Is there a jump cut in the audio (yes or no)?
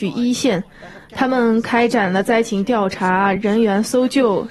no